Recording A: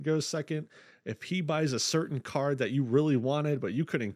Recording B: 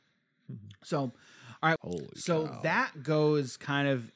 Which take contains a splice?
B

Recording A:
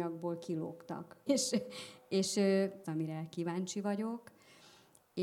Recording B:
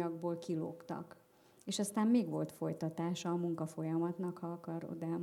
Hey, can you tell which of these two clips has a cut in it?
A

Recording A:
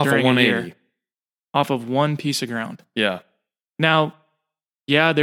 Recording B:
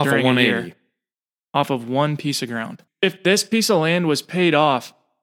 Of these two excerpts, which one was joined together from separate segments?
B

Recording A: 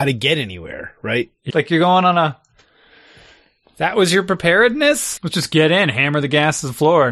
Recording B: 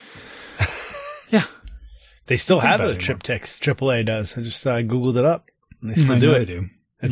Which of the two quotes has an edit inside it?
A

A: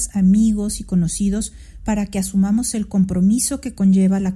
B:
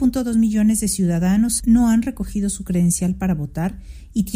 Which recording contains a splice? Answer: B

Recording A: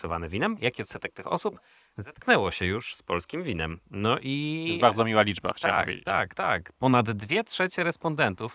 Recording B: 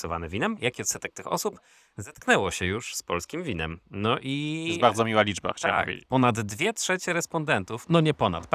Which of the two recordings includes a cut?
B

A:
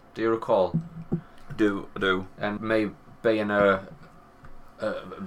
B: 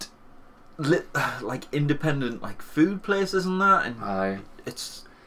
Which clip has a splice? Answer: A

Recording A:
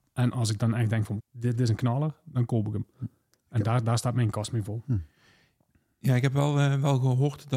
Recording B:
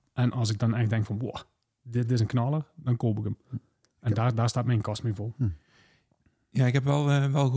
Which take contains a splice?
A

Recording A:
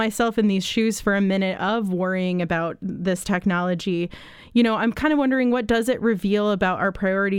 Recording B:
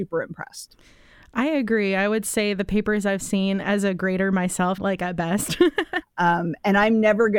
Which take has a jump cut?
B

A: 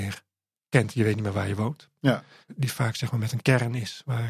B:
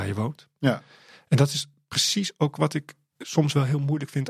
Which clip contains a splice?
A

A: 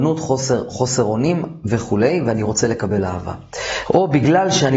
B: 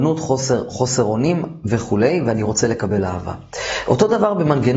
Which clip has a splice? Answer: A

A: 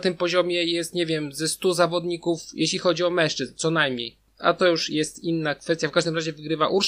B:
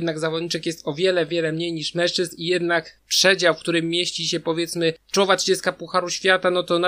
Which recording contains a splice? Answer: B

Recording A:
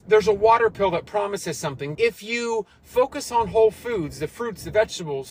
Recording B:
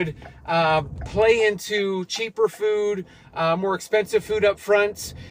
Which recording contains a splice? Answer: A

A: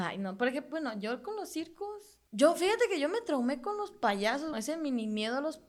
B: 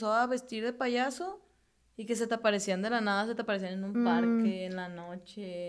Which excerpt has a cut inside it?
A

